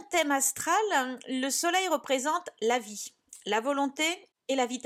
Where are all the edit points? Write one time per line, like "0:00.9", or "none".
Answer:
none